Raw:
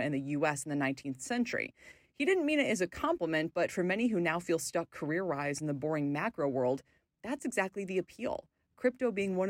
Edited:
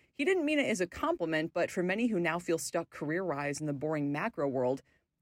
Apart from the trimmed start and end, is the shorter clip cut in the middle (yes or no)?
no